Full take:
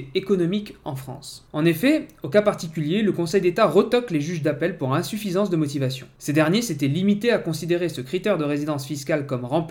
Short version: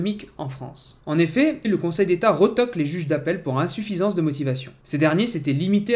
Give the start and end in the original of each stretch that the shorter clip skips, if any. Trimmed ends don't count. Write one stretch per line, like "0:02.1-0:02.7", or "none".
0:02.1-0:03.0